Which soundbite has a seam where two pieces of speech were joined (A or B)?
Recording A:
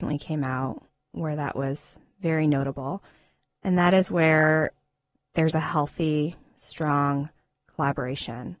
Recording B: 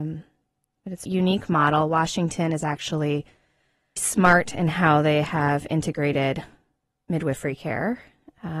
B